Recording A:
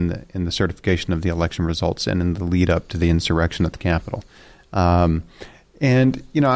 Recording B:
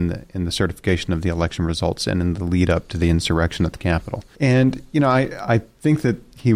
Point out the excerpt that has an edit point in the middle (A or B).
B